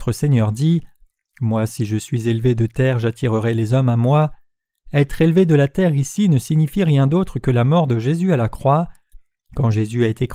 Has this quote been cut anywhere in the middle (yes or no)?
no